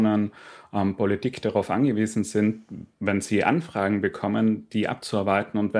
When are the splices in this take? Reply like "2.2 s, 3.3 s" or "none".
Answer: none